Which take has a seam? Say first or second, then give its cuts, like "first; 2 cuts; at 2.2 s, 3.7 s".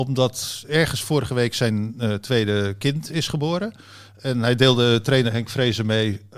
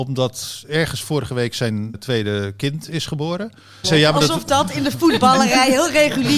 second; 2 cuts; at 1.9 s, 3.8 s